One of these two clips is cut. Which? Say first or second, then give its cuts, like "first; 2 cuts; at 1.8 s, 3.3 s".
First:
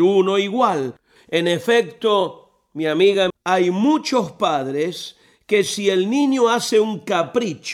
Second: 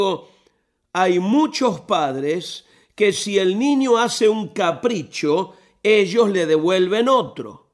first; 2 cuts; at 1.2 s, 3.3 s